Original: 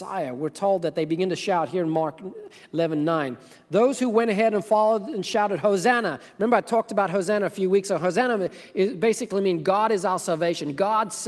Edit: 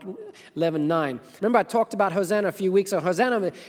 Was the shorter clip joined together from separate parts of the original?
yes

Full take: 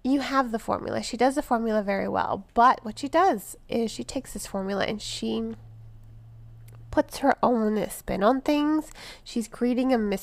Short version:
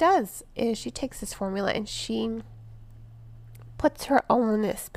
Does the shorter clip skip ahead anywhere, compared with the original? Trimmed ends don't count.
no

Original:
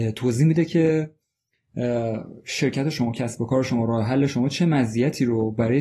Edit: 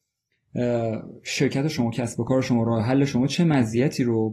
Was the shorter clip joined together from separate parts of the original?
no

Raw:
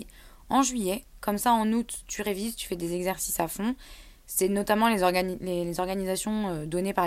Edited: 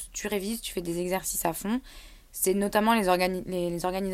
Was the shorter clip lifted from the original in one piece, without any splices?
yes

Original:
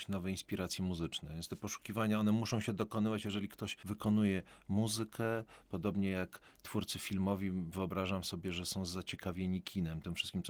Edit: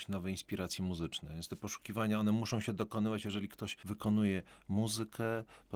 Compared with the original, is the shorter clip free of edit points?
yes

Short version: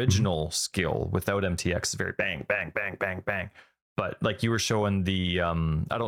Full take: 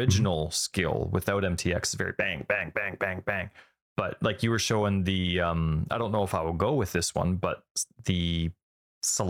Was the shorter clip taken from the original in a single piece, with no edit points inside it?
yes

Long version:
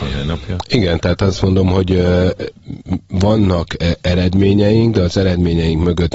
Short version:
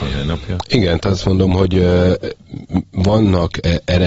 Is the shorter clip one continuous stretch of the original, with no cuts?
no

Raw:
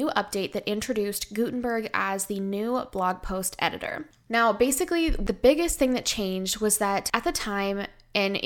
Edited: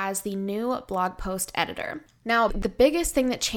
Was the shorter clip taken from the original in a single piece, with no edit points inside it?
no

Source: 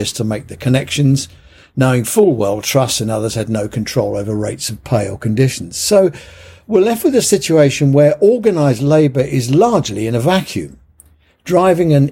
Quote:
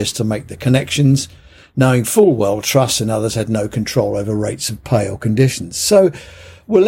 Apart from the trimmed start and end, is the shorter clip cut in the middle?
no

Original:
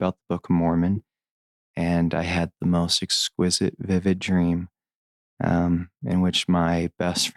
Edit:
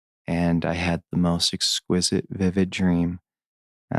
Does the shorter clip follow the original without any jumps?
yes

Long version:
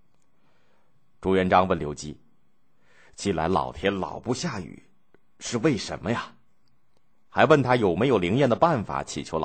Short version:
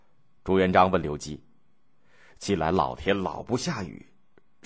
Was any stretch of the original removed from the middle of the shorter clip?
no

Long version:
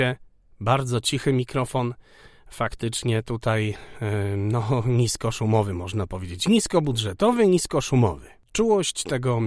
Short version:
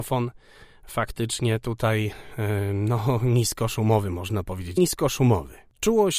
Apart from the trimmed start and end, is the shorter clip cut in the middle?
yes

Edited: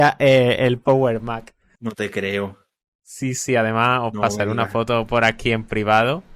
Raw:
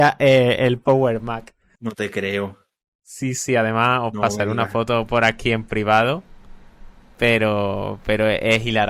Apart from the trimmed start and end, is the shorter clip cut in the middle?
no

